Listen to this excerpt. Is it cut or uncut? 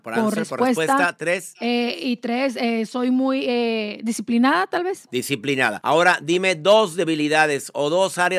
uncut